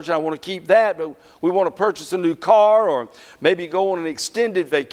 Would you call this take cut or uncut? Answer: uncut